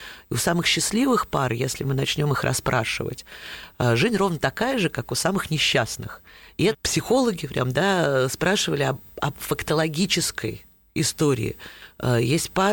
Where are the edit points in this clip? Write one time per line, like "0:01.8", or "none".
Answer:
0:06.7